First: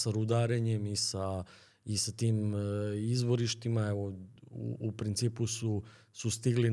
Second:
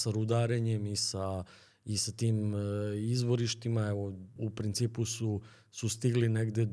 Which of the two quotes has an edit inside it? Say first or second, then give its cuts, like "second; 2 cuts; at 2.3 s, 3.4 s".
second; 1 cut; at 4.4 s